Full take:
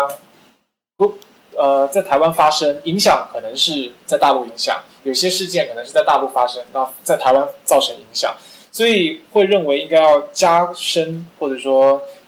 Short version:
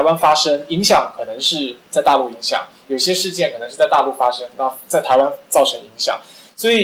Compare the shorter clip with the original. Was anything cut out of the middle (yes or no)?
no